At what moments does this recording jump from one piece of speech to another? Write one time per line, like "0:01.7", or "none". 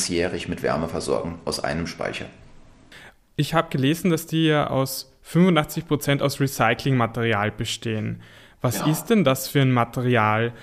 none